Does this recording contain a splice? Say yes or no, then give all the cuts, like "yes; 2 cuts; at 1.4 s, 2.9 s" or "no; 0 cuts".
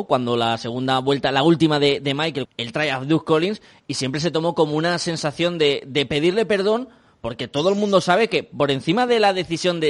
yes; 1 cut; at 2.5 s